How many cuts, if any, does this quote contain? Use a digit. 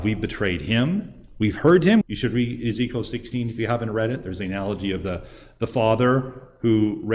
1